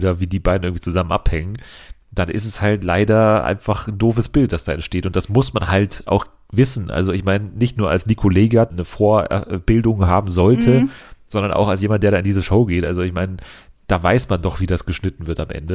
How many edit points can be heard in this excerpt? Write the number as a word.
one